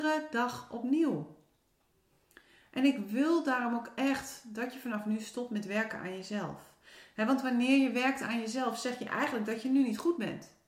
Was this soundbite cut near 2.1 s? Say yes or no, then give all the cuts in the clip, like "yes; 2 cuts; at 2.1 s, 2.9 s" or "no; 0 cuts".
no; 0 cuts